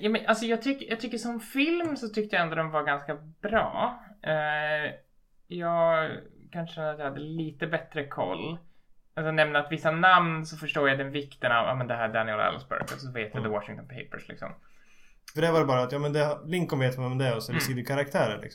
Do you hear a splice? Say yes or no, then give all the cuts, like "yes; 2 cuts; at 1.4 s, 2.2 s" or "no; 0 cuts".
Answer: yes; 1 cut; at 15.3 s